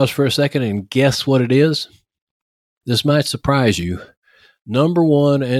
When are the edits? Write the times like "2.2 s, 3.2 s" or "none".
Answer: none